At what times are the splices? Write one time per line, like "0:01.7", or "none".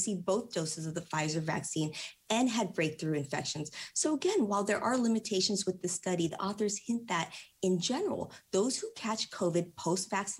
none